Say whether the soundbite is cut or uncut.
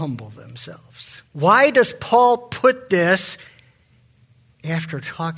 cut